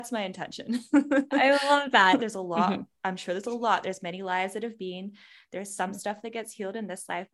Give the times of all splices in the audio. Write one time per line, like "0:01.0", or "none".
0:02.2